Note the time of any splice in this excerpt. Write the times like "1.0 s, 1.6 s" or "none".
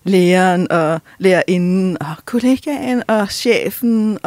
none